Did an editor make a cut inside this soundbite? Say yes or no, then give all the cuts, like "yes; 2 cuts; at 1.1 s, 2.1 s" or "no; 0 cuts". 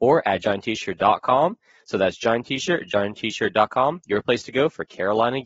no; 0 cuts